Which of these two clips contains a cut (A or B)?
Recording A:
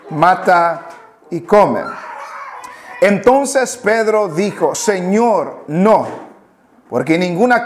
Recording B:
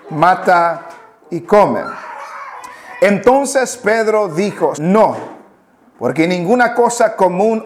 B